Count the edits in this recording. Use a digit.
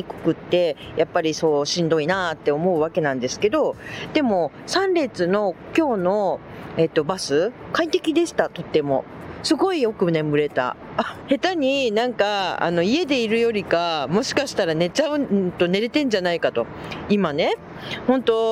1